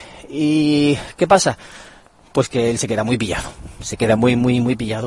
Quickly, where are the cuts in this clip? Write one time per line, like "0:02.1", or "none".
none